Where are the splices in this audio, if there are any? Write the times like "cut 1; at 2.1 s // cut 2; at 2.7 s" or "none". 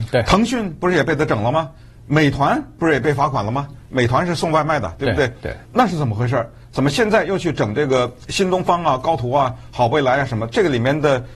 cut 1; at 5.6 s